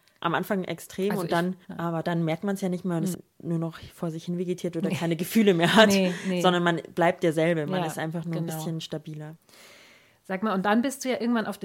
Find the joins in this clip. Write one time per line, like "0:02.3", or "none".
0:01.6
0:03.1